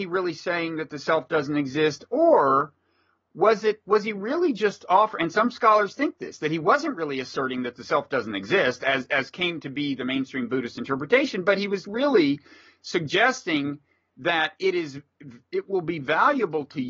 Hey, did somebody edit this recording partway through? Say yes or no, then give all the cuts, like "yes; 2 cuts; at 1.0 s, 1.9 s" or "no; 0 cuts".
yes; 1 cut; at 11.8 s